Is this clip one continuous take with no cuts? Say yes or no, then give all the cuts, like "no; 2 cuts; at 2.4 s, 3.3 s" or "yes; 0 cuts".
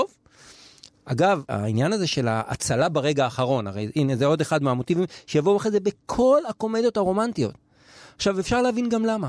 yes; 0 cuts